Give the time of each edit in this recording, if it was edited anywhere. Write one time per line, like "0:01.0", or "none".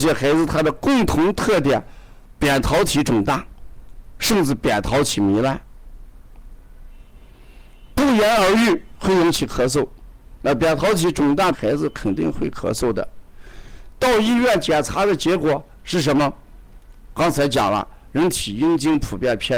0:11.5
0:17.1